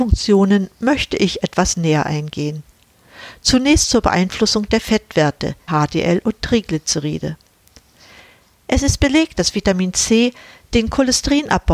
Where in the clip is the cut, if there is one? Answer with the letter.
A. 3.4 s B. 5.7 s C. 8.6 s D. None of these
B